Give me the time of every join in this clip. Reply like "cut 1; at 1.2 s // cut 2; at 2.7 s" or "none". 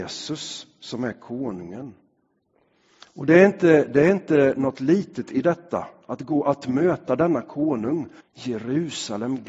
cut 1; at 8.2 s

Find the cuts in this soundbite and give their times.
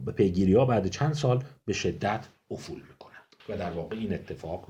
cut 1; at 3.4 s

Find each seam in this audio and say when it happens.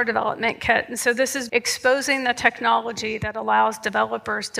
cut 1; at 1.5 s

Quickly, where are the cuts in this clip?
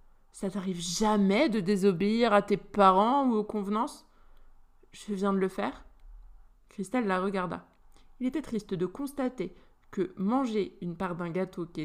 none

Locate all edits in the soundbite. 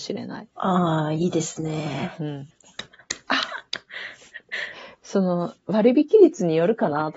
cut 1; at 2.6 s

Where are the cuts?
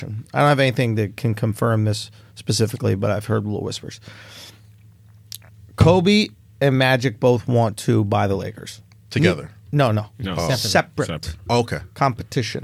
none

